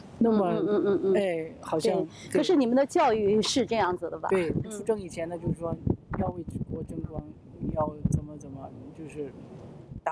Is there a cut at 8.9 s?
no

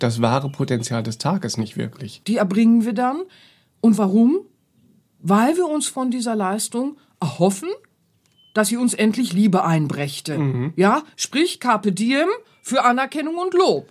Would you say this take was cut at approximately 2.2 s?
yes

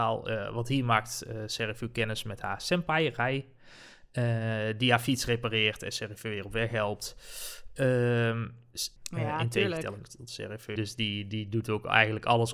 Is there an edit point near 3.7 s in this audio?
no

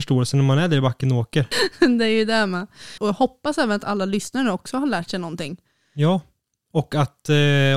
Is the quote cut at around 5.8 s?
no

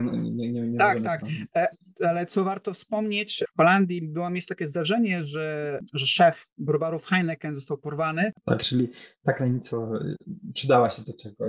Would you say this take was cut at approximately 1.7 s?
yes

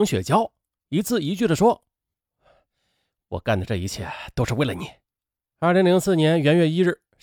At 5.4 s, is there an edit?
yes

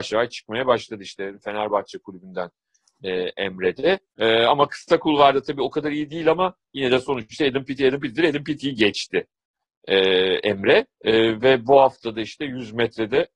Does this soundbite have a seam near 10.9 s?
yes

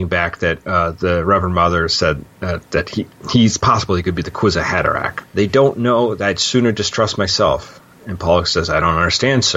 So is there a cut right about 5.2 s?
yes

